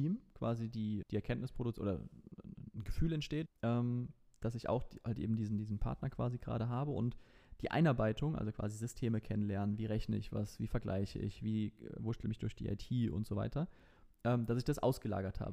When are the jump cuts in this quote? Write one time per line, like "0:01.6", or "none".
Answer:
0:01.0
0:03.5